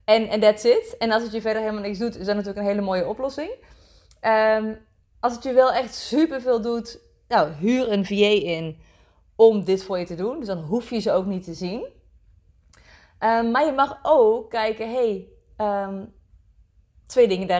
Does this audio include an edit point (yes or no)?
no